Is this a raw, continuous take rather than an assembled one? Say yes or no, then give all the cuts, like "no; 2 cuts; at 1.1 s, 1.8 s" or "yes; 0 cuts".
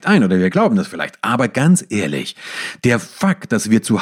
yes; 0 cuts